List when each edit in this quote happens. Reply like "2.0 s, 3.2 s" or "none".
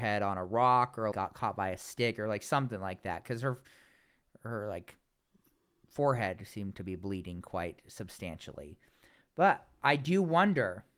1.1 s